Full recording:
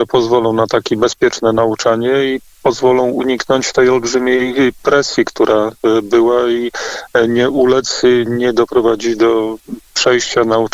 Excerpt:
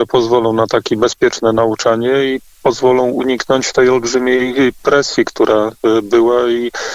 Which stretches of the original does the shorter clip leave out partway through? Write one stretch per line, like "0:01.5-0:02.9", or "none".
none